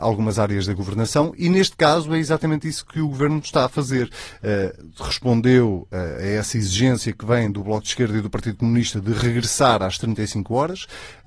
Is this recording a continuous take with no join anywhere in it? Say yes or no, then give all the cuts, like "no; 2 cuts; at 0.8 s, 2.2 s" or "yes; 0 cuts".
yes; 0 cuts